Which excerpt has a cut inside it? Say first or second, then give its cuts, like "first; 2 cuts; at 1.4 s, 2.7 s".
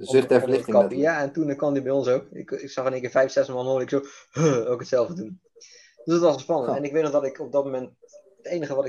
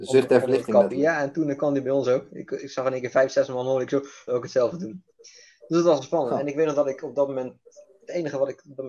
second; 1 cut; at 4.3 s